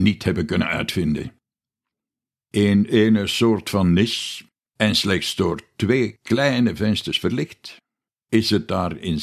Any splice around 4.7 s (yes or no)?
yes